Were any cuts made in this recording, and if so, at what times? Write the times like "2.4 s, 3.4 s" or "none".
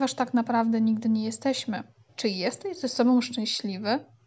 2.1 s